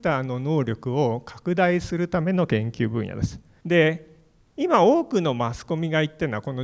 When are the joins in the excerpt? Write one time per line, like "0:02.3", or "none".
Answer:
0:03.6